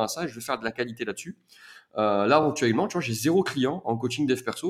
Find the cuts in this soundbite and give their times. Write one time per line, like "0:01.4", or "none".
none